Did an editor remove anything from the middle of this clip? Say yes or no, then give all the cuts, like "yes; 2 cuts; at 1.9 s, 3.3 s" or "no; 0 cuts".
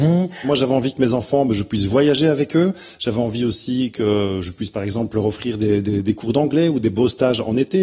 no; 0 cuts